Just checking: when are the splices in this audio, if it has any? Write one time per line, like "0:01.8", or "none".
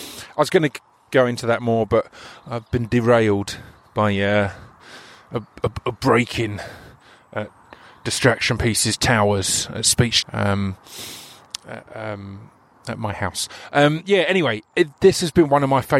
0:10.2